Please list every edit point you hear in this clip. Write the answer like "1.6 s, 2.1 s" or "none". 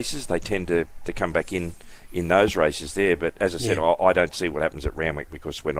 none